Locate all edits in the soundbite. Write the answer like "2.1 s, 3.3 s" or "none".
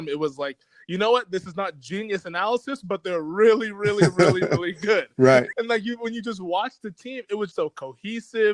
5.5 s, 7.5 s